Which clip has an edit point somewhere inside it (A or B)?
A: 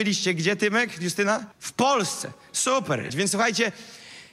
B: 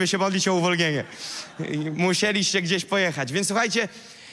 A